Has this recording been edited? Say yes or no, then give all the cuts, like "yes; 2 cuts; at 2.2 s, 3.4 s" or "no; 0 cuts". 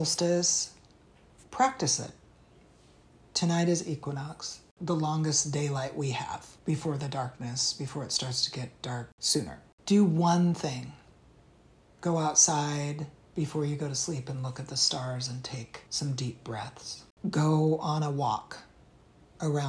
yes; 2 cuts; at 6.6 s, 15.9 s